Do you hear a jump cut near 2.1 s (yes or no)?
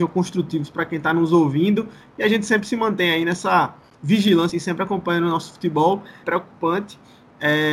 no